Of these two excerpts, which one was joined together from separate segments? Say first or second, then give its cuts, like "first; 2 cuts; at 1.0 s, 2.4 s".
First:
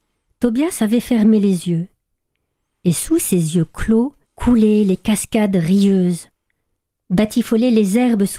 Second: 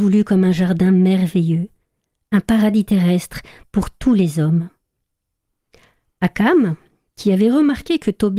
first; 1 cut; at 4.2 s